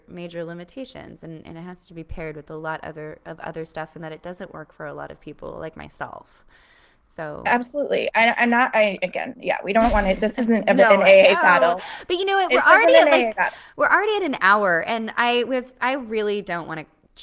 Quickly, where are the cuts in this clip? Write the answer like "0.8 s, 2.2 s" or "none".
none